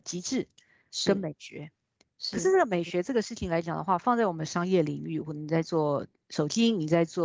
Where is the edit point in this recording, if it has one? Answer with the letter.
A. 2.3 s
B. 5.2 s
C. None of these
B